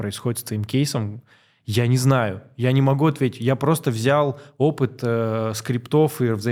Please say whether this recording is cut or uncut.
uncut